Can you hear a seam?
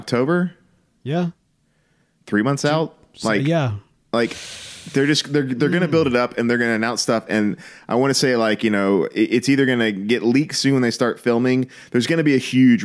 no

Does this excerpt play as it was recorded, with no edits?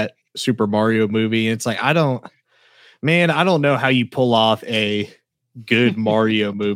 yes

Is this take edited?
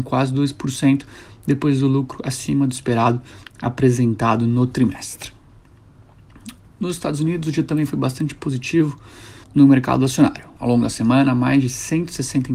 yes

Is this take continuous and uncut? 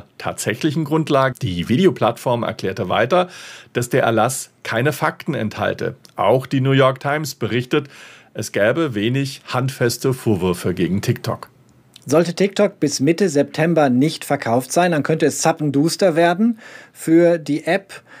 no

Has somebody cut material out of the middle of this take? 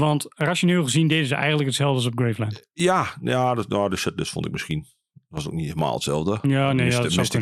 no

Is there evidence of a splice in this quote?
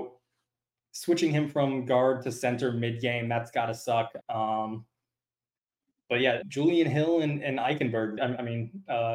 yes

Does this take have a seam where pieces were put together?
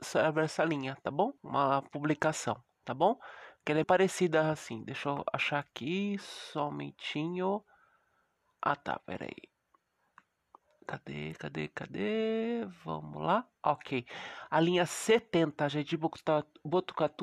yes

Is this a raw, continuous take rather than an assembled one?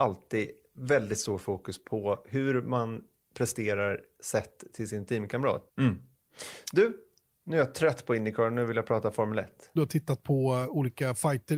no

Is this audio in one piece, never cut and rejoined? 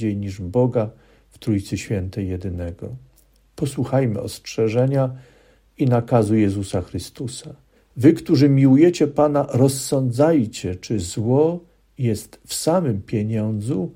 no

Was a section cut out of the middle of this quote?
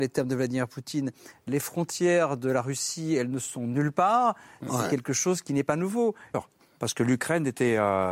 yes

